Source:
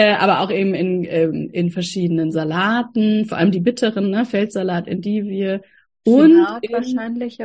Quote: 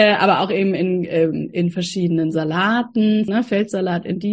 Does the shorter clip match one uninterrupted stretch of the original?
no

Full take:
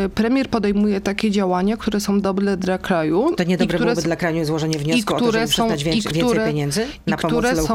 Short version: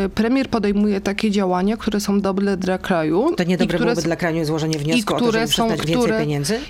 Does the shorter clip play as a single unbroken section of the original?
no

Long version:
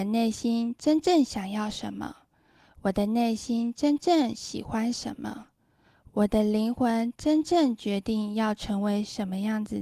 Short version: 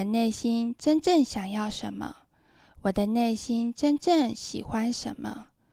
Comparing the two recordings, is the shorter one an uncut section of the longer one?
yes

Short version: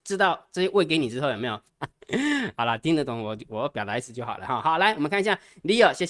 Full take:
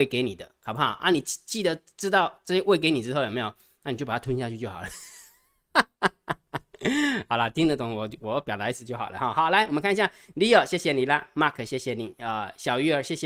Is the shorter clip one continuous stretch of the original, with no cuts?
no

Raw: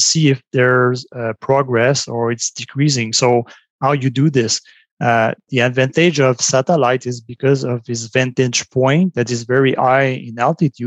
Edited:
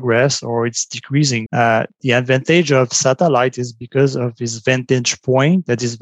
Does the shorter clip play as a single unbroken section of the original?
no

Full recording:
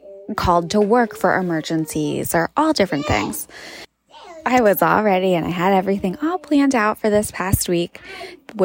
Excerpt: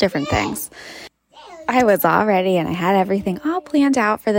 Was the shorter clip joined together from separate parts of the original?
no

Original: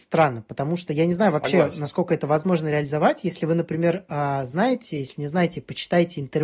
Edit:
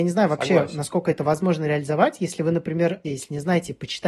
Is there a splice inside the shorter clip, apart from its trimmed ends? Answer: yes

